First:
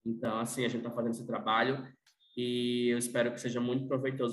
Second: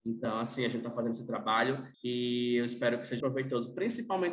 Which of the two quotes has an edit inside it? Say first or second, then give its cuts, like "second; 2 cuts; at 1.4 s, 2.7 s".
second; 2 cuts; at 1.9 s, 3.2 s